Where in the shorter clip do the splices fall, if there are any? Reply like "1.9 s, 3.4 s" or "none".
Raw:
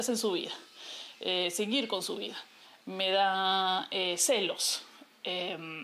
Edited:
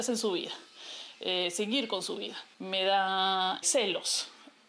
2.5 s, 3.6 s